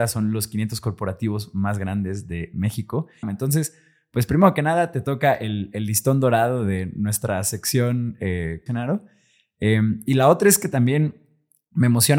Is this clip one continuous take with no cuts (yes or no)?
no